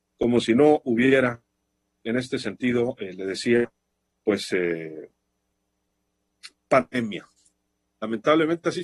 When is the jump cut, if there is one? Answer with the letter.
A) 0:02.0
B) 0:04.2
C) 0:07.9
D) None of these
A